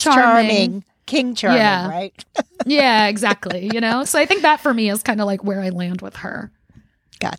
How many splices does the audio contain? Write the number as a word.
one